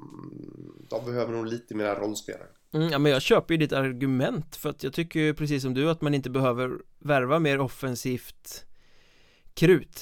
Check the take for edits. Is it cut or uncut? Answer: uncut